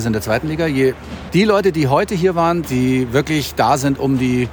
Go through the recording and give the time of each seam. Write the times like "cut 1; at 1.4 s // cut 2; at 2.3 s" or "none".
cut 1; at 1.3 s // cut 2; at 2.6 s